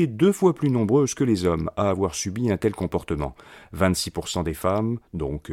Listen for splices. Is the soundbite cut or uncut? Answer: uncut